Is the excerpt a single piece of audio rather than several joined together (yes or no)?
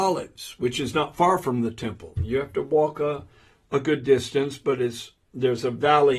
yes